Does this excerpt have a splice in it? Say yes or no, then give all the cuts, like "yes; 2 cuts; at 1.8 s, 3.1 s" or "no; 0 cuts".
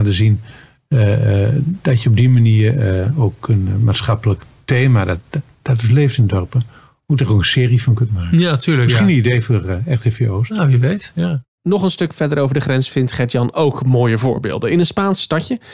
no; 0 cuts